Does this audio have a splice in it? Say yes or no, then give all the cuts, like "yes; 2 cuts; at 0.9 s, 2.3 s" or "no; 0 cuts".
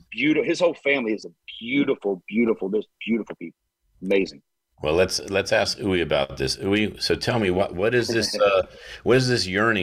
no; 0 cuts